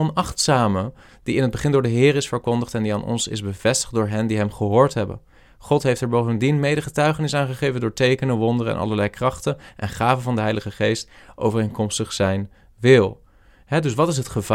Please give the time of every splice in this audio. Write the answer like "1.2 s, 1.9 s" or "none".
none